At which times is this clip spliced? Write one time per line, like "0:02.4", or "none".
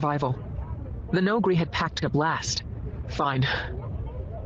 0:02.0
0:03.1